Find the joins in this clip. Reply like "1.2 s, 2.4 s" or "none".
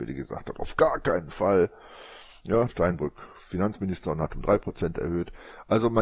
2.7 s